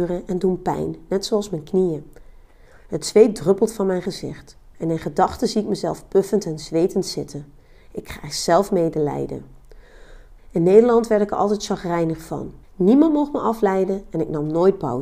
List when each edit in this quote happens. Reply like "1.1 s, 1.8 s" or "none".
10.4 s, 12.6 s